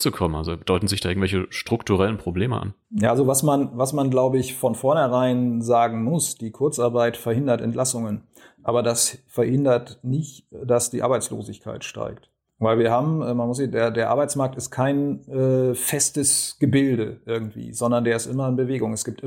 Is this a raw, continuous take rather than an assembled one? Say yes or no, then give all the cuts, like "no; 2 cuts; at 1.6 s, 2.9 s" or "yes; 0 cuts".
yes; 0 cuts